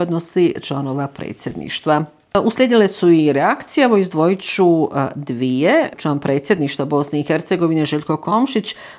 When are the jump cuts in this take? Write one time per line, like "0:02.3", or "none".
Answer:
none